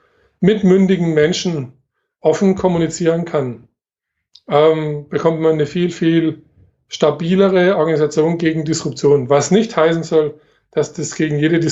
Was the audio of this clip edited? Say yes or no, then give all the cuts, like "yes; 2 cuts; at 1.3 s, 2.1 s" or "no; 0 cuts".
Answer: no; 0 cuts